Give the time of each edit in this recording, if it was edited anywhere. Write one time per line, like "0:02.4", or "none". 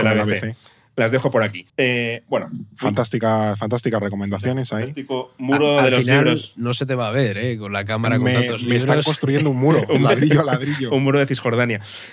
0:01.7